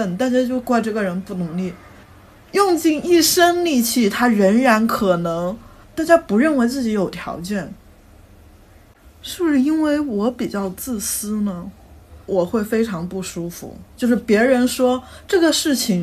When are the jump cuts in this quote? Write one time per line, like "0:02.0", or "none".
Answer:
0:05.8
0:12.2
0:13.9